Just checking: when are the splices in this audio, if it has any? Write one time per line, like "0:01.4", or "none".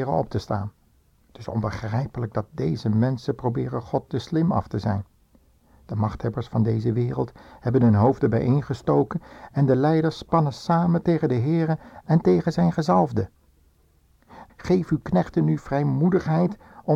0:14.5

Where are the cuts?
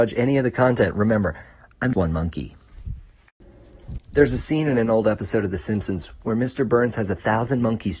0:01.9
0:04.0

